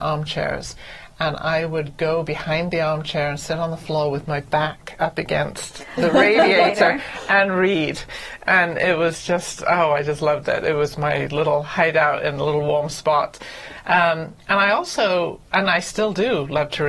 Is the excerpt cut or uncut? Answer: uncut